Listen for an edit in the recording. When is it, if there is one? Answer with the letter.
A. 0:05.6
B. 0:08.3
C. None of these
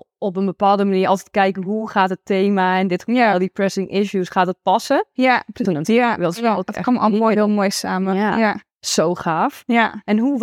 A